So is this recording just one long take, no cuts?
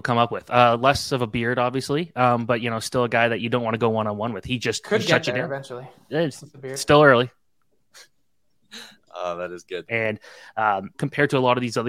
no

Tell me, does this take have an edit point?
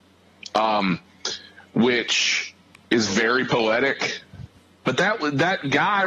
yes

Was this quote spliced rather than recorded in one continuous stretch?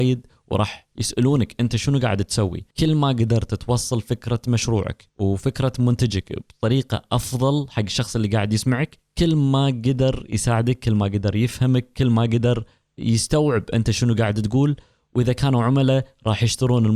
yes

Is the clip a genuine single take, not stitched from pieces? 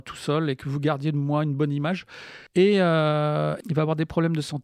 no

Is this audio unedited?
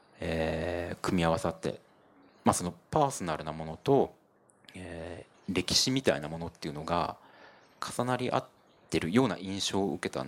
yes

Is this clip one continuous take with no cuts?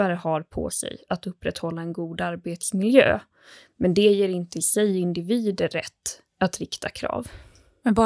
yes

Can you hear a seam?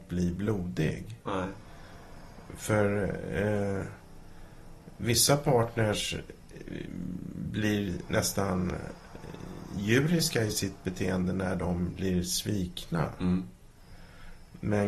no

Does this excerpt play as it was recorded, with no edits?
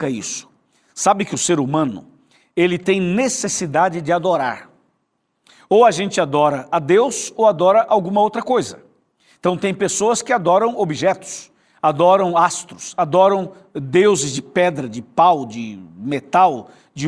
yes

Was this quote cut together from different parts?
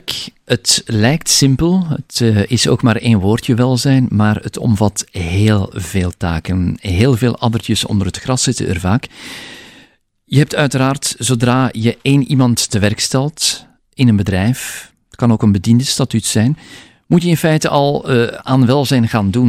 no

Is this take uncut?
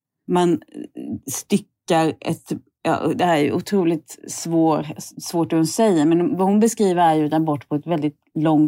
yes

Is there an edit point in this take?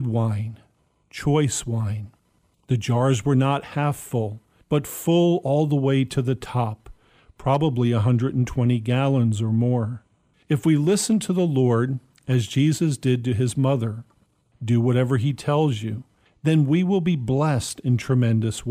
yes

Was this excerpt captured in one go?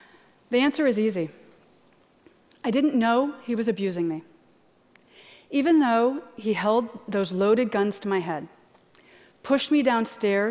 yes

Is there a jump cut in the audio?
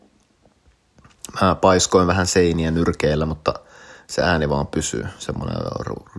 no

